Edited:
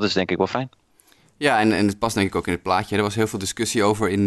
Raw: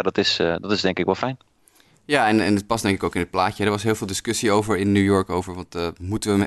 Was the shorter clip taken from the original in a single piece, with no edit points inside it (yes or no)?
yes